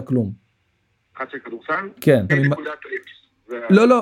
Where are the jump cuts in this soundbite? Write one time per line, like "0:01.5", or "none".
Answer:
0:02.3